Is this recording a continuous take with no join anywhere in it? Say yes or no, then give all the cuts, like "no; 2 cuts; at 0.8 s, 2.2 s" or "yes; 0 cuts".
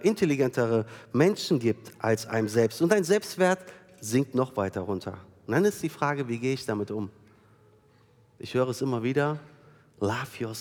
yes; 0 cuts